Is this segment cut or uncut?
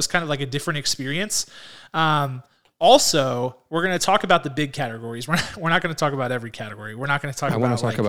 uncut